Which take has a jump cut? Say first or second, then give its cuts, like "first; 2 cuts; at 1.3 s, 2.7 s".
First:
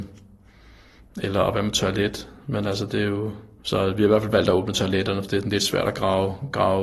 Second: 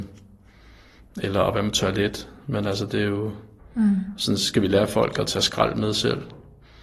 second; 1 cut; at 3.6 s